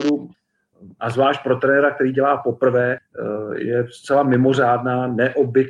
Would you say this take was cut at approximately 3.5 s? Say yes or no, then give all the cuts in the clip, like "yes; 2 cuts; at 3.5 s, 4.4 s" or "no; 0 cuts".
no; 0 cuts